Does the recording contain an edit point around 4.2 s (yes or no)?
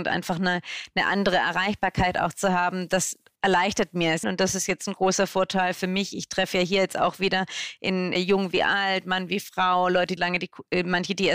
yes